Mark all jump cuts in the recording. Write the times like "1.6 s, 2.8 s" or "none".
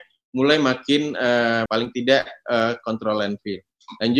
1.7 s

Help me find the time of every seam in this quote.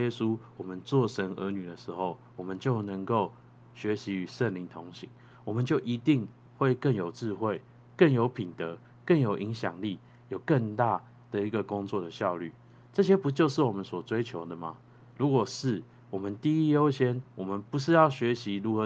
none

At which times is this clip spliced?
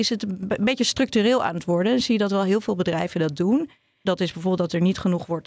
4.1 s

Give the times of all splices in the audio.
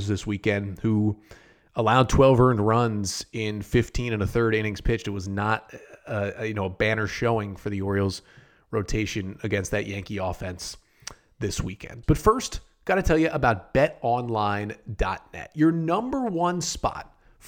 12.0 s

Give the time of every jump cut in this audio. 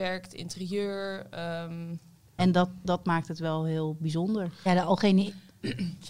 2.4 s, 4.7 s

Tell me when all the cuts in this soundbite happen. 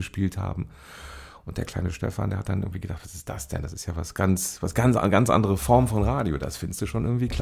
none

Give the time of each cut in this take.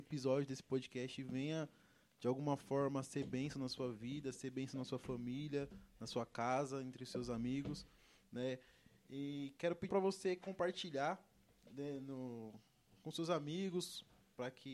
9.9 s

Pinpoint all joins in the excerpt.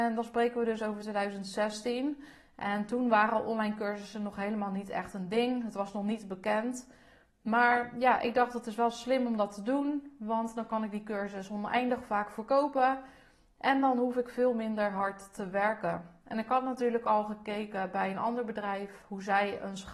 none

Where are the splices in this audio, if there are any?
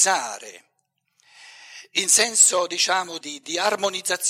3.2 s

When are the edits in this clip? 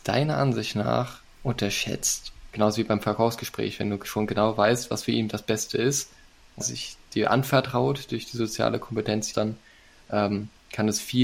2.5 s, 6.6 s, 9.3 s

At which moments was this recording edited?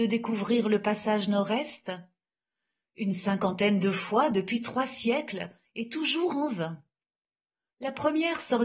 7.7 s

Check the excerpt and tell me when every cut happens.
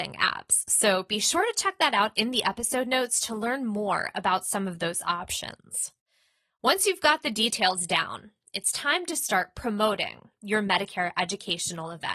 none

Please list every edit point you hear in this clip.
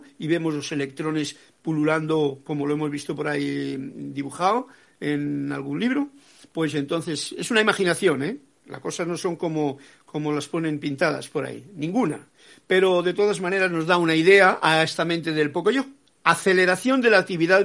16.1 s

